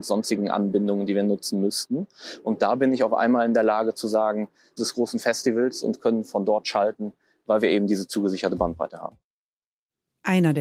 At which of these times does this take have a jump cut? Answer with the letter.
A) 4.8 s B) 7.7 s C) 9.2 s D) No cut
A